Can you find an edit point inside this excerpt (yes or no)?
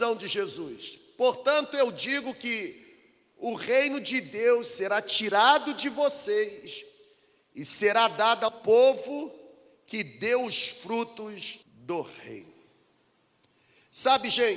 yes